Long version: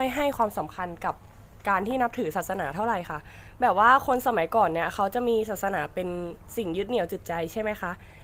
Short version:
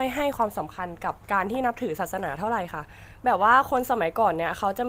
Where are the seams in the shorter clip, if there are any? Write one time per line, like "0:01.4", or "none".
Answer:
0:01.2